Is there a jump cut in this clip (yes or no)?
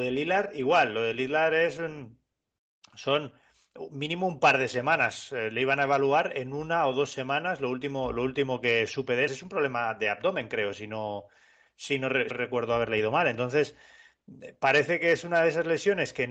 yes